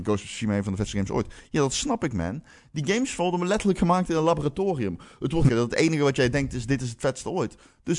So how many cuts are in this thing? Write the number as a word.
one